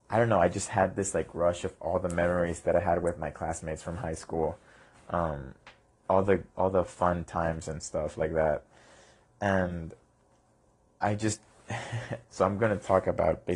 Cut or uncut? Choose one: uncut